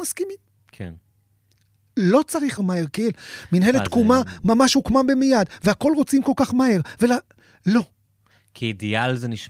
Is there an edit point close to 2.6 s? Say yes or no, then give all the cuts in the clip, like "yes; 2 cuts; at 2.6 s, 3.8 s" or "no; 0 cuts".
yes; 1 cut; at 2.6 s